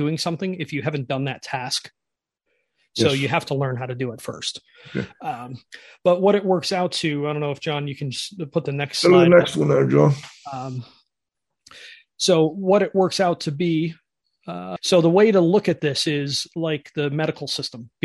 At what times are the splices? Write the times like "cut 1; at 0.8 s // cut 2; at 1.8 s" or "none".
cut 1; at 14.8 s